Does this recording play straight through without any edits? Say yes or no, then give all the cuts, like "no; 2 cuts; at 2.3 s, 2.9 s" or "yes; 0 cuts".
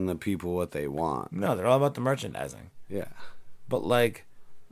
yes; 0 cuts